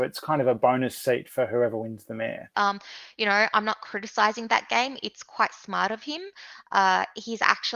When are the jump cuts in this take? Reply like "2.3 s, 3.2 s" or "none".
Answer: 2.5 s